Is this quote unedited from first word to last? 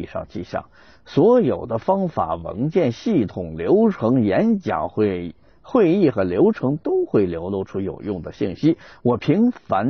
yes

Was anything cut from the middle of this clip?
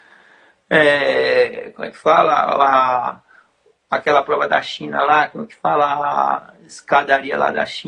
no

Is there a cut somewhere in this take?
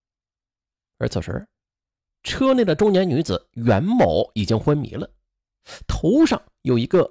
no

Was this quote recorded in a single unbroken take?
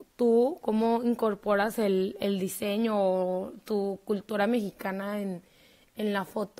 yes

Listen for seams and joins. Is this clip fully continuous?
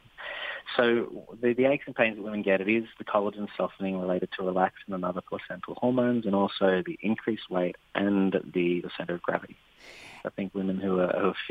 no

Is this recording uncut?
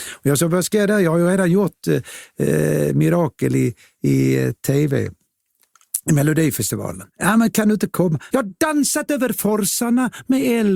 no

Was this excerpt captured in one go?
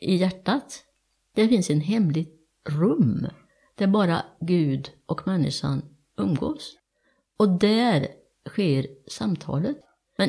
yes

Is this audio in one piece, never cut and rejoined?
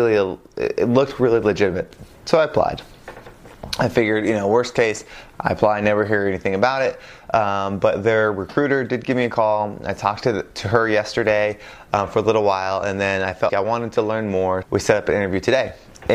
no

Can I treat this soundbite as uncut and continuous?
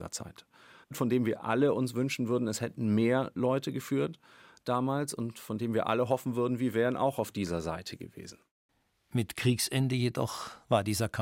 yes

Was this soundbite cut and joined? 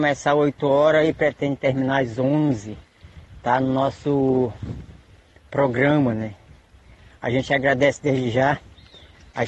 no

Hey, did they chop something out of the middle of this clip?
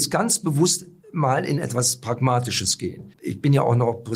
yes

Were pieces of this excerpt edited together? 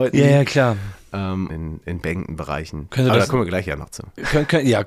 yes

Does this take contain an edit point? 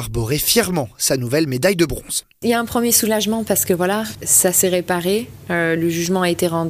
no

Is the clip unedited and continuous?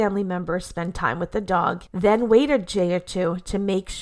yes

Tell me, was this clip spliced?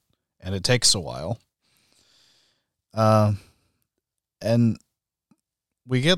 no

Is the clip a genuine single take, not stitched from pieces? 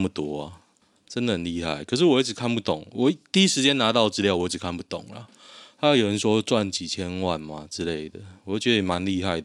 yes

